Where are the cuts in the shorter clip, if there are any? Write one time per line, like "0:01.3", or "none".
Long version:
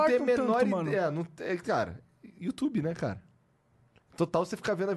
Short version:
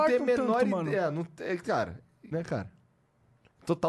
0:02.3